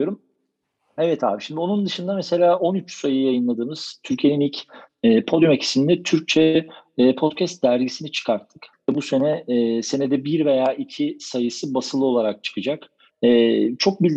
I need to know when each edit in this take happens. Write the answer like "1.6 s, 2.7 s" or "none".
8.7 s, 13.1 s

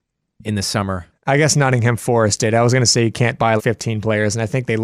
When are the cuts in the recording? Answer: 1.1 s, 3.6 s

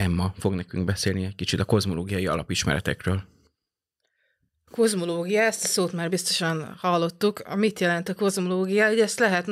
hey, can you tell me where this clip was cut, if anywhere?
none

